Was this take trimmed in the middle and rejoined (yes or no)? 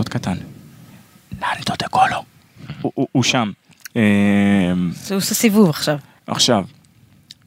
yes